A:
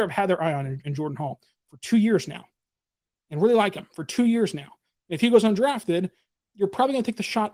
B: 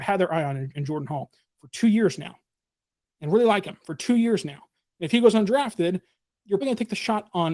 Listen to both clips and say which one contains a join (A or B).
B